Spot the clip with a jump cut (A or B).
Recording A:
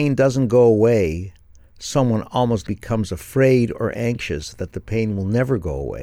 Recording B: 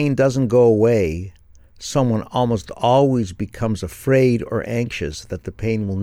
A